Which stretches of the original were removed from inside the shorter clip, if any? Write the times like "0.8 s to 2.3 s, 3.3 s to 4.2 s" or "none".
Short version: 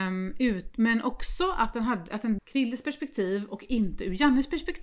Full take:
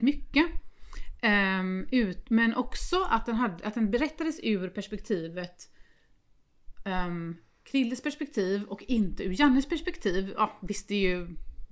3.9 s to 7.6 s